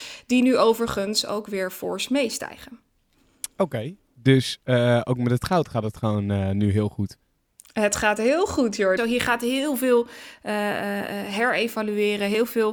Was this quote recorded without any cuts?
no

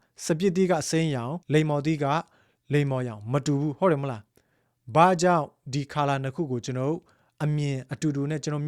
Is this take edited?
yes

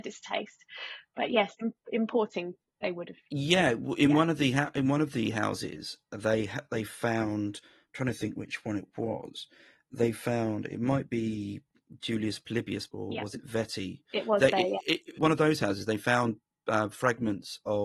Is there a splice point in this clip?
yes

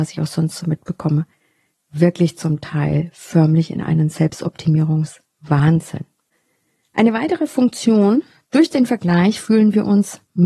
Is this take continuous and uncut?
yes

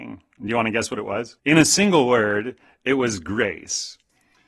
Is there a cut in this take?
yes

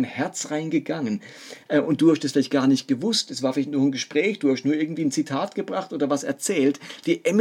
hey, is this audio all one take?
yes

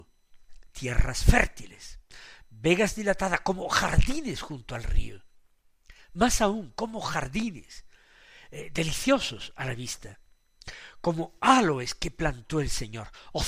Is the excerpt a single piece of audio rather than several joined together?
yes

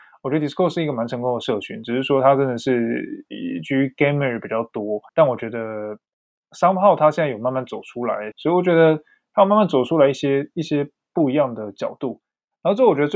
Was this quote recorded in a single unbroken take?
no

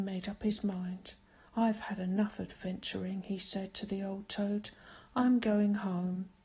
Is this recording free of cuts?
yes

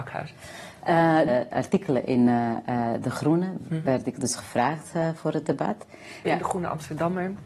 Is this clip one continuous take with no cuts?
no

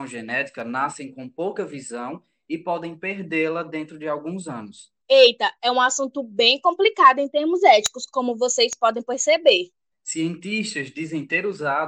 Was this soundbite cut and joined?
yes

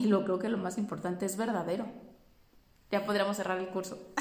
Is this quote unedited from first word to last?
no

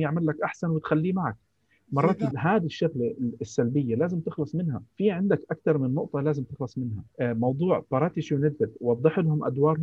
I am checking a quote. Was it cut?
yes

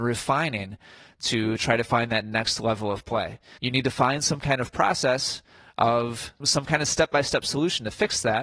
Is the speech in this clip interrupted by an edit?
yes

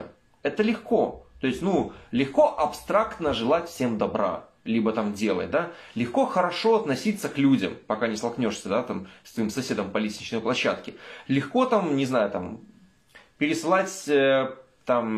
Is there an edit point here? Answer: no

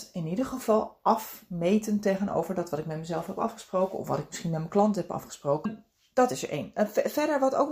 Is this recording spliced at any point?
yes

